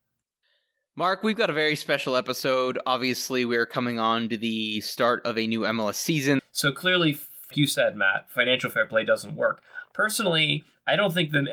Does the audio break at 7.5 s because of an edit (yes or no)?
yes